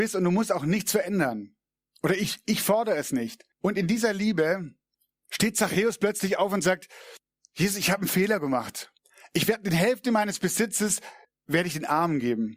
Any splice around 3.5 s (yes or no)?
yes